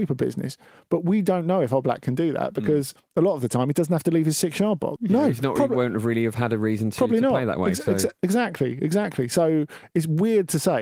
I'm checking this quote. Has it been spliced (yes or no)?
yes